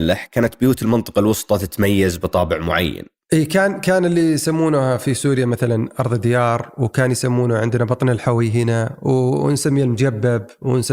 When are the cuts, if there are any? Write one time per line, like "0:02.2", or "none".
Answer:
none

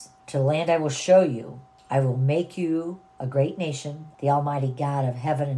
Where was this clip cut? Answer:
0:04.1

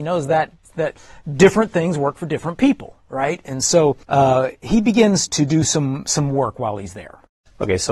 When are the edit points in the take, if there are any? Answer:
0:04.0
0:05.3

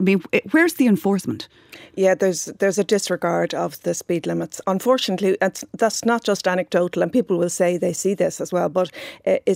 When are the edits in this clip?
none

